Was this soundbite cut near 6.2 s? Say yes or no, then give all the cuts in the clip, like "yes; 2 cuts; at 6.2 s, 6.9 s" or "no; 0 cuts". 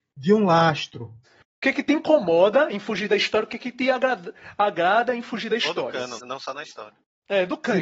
yes; 2 cuts; at 1.2 s, 6.2 s